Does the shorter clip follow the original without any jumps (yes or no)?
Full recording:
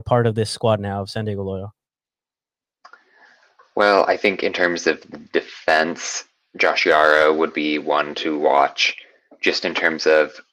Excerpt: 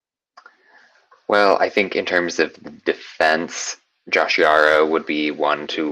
yes